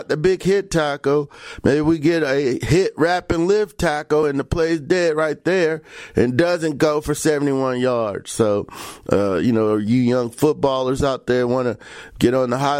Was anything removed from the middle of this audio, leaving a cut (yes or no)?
no